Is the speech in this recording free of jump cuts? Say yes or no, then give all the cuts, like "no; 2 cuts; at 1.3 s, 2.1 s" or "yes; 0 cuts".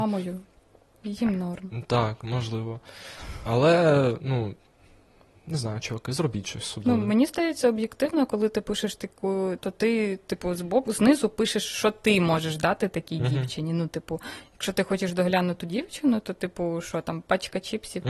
no; 1 cut; at 9.6 s